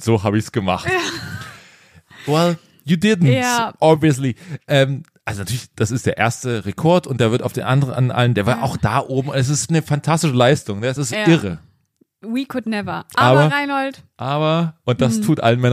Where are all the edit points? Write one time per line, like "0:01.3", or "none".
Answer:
none